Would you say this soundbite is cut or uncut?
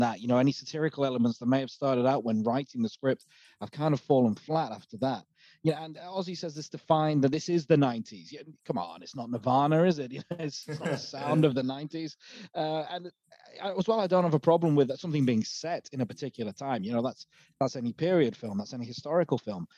uncut